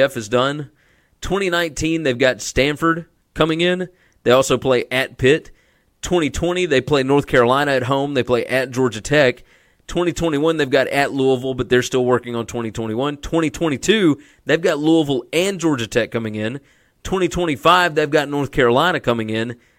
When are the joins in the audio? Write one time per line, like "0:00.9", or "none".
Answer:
none